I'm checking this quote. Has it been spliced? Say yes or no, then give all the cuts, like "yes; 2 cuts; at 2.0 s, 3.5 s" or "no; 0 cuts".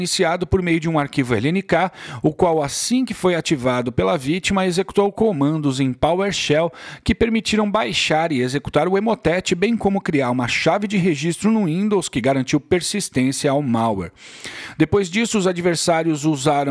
no; 0 cuts